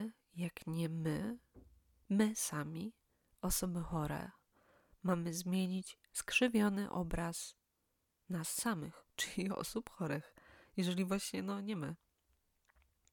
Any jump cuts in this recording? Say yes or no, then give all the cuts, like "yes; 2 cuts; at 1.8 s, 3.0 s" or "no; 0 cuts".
no; 0 cuts